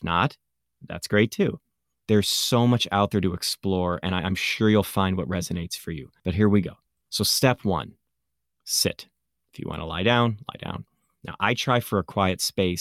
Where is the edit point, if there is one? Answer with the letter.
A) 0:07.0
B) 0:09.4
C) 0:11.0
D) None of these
B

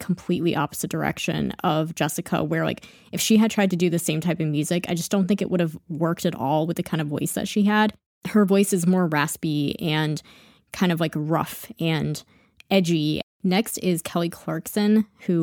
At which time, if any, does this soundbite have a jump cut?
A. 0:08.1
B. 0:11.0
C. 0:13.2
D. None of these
C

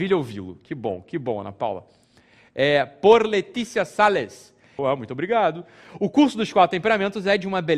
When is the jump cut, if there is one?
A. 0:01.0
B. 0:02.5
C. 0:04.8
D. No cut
C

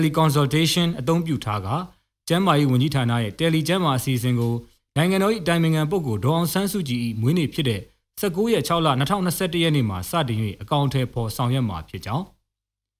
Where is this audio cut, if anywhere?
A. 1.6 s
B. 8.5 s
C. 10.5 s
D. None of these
D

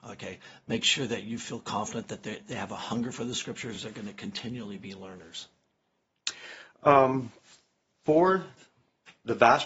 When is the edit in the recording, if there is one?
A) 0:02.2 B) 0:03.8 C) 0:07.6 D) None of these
D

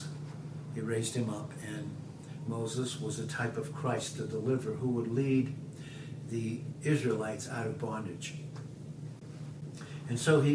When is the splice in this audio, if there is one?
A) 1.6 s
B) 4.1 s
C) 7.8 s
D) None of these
D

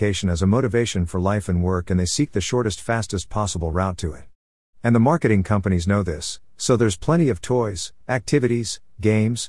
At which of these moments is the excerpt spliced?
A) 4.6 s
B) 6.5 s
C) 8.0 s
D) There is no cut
C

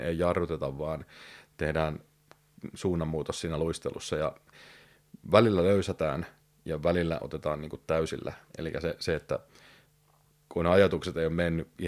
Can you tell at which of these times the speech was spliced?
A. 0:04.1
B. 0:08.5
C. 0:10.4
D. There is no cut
D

